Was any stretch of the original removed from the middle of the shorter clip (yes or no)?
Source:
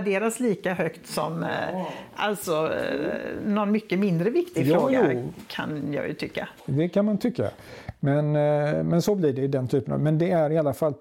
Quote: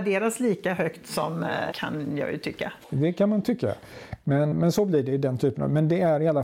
yes